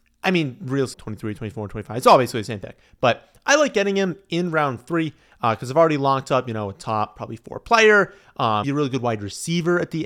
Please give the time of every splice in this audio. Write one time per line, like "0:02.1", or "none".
0:00.9
0:08.6